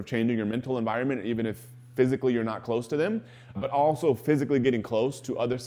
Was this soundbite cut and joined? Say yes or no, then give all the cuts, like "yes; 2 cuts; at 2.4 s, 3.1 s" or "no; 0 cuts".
yes; 1 cut; at 3.6 s